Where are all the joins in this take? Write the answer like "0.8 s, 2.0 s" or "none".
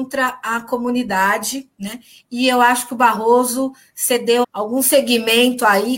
4.4 s